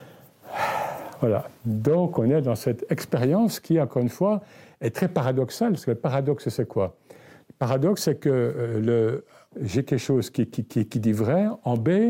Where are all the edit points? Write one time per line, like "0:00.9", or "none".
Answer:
0:09.5